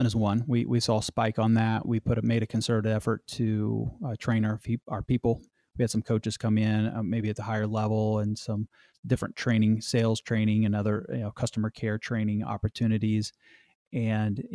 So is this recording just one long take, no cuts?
no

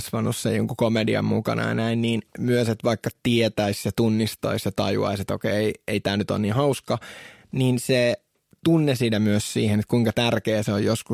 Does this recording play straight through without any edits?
yes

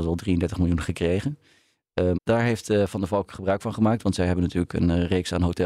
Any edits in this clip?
yes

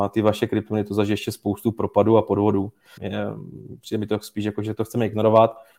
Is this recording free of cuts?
no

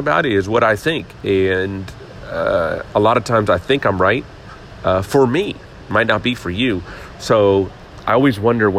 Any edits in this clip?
no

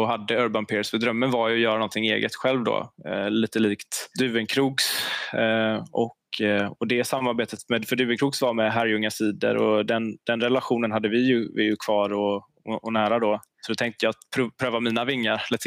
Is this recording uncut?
yes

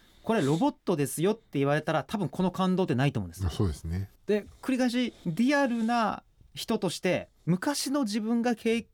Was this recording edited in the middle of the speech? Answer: yes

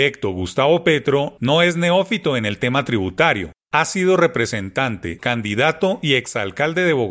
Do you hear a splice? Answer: yes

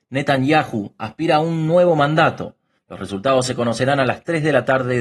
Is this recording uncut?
no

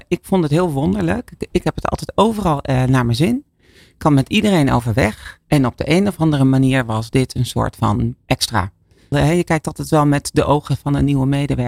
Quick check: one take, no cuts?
no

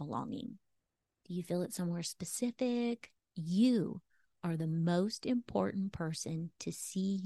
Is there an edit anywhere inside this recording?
yes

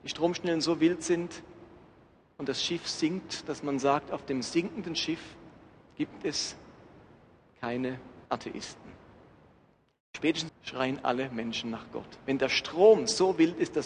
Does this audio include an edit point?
yes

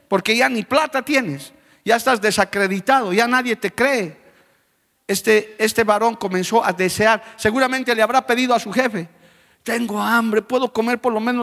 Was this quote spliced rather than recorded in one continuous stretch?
no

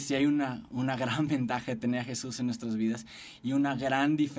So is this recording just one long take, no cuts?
yes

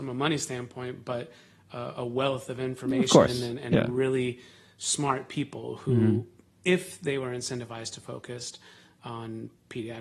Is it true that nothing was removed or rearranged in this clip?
yes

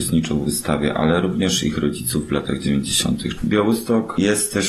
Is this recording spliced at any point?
yes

